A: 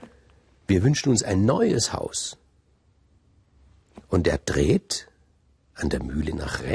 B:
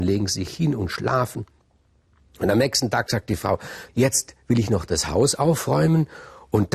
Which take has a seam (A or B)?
B